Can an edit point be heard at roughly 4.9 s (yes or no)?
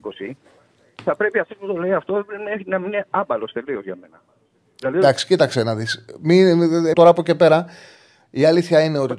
no